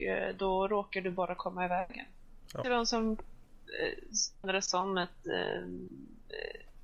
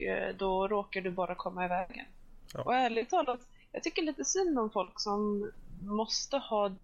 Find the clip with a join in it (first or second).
first